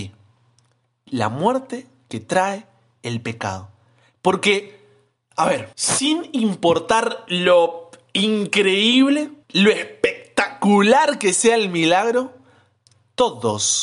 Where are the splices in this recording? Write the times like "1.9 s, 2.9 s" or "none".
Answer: 5.7 s, 9.4 s